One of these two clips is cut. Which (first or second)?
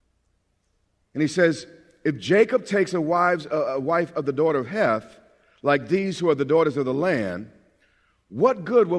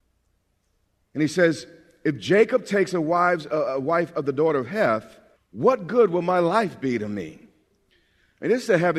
second